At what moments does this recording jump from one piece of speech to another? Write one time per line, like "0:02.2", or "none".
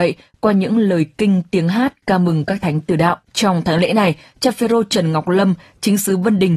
0:03.3